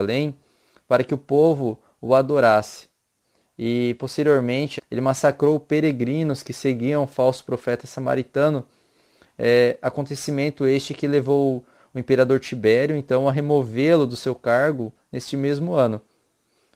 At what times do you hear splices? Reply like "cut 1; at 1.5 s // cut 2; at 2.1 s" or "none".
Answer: cut 1; at 4.8 s